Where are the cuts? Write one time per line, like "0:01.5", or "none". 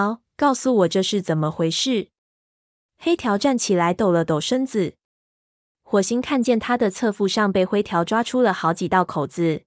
none